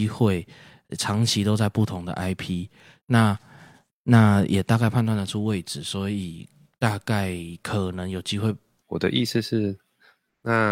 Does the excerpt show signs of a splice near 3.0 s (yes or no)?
no